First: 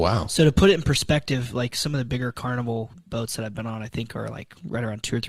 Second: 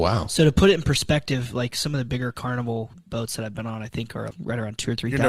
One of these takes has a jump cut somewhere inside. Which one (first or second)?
second